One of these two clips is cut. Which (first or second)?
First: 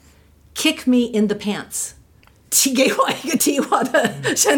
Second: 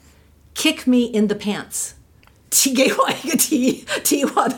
first